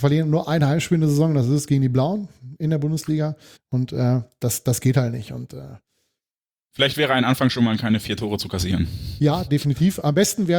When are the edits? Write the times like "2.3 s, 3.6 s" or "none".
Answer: 3.6 s